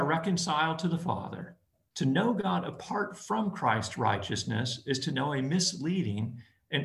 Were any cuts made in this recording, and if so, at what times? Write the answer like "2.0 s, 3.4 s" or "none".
1.9 s